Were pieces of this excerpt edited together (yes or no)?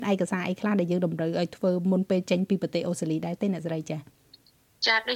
no